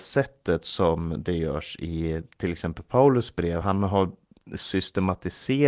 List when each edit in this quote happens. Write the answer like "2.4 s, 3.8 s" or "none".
none